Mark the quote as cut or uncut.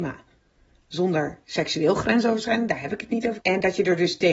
cut